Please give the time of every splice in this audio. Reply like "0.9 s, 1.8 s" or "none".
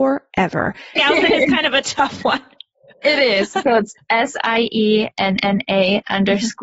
1.0 s